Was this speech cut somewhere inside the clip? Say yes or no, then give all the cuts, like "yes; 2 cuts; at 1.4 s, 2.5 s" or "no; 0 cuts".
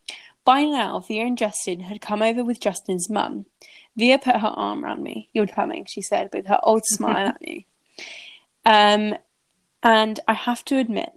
yes; 1 cut; at 5.5 s